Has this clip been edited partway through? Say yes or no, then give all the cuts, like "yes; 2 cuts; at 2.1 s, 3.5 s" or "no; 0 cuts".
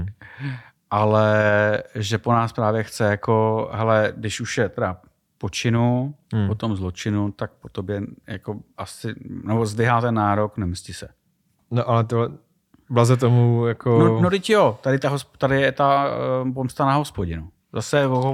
yes; 1 cut; at 6.2 s